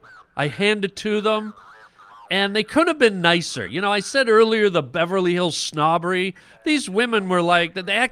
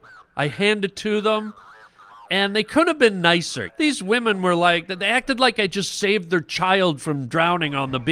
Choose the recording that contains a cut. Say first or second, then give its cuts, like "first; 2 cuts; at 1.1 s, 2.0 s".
second; 1 cut; at 3.7 s